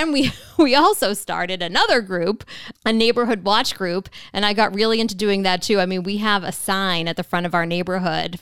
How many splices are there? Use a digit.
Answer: 1